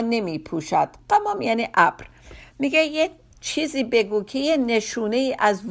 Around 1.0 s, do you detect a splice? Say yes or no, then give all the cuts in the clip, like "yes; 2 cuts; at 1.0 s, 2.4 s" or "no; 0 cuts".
yes; 1 cut; at 1.0 s